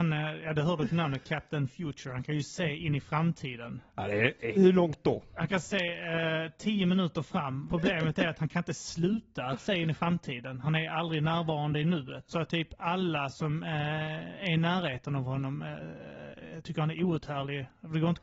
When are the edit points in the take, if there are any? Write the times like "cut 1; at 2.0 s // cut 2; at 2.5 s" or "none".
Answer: cut 1; at 4.5 s // cut 2; at 7.7 s // cut 3; at 12.3 s